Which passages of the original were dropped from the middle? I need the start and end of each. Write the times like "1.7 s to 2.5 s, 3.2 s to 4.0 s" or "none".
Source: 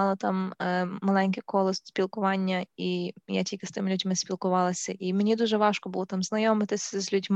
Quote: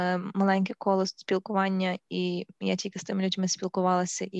none